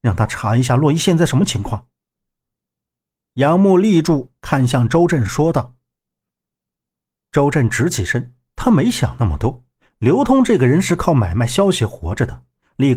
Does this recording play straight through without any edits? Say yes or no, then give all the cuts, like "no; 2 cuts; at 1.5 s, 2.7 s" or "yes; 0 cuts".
yes; 0 cuts